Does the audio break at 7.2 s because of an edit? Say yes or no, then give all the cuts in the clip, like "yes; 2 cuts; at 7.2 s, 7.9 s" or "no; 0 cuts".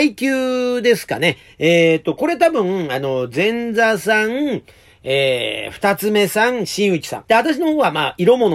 yes; 1 cut; at 7.2 s